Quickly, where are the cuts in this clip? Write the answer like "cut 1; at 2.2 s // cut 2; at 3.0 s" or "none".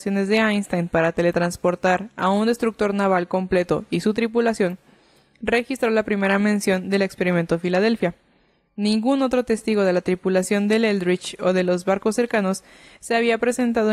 none